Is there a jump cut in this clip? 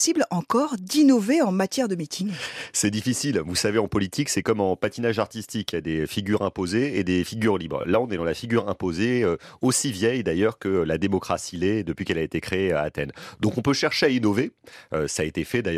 no; 0 cuts

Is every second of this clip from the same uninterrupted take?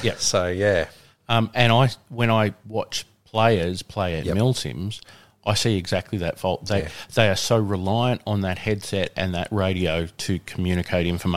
yes; 0 cuts

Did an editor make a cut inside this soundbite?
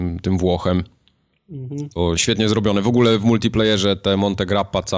yes; 1 cut; at 2.2 s

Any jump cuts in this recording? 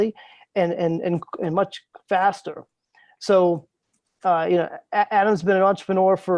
no; 0 cuts

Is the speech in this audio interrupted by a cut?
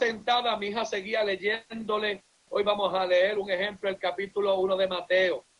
no; 0 cuts

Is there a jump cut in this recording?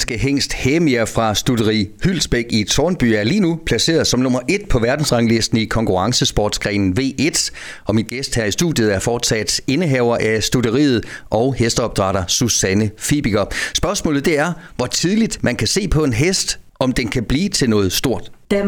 no; 0 cuts

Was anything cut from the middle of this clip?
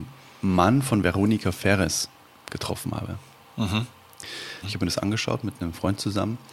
yes; 1 cut; at 4.6 s

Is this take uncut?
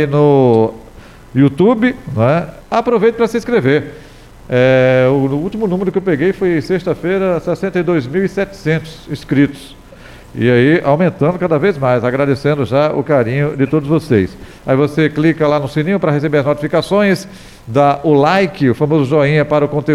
no; 1 cut; at 2.6 s

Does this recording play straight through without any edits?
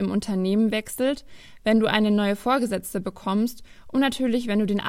yes; 0 cuts

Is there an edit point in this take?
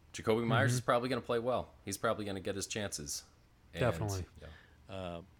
yes; 1 cut; at 4.3 s

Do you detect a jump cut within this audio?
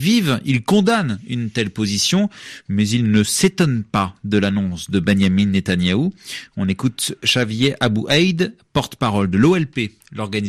no; 0 cuts

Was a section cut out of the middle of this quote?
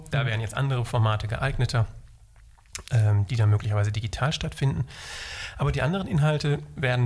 no; 0 cuts

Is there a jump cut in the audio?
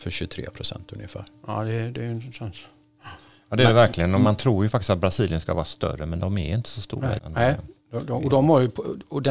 yes; 1 cut; at 7.2 s

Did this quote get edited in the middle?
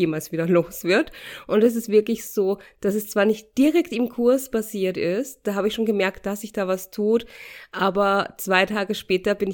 no; 0 cuts

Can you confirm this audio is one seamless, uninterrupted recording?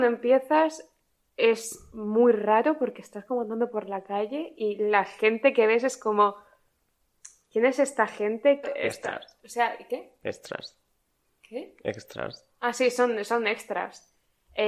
no; 1 cut; at 8.6 s

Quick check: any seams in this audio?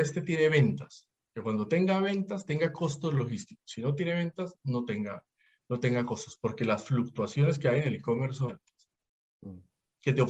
yes; 1 cut; at 8.5 s

